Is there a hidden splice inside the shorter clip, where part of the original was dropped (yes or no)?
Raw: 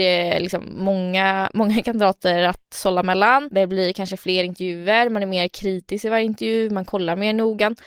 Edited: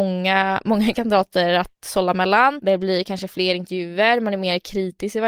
no